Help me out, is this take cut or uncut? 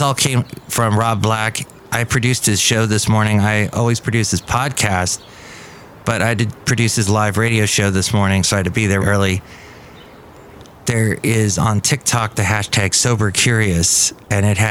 cut